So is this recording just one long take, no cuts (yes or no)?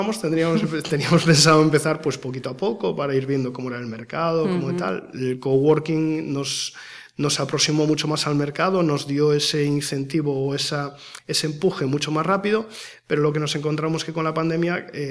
yes